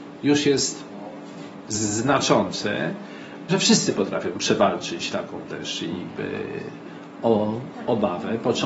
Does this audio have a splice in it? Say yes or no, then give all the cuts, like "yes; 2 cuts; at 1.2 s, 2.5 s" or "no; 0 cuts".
yes; 1 cut; at 3.5 s